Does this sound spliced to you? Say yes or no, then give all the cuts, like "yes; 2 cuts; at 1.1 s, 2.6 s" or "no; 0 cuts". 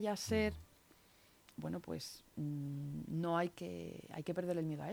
no; 0 cuts